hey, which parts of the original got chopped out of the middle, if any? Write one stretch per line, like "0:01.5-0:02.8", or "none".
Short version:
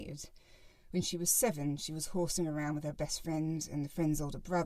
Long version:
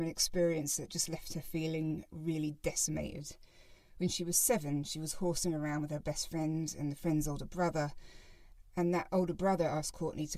none